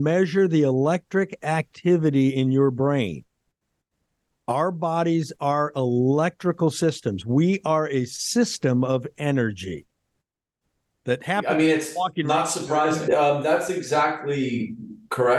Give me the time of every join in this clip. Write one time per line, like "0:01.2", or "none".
0:13.1